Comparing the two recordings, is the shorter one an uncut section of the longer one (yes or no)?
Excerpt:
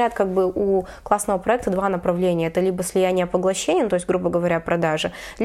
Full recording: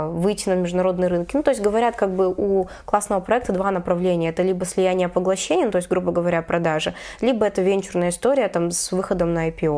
yes